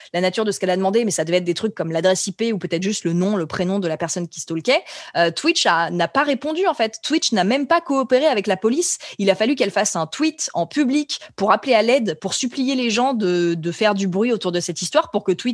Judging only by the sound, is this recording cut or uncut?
uncut